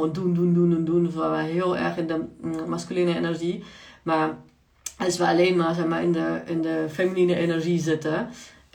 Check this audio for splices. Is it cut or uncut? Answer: uncut